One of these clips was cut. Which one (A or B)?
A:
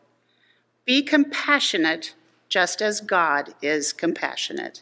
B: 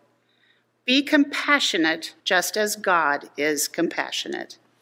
B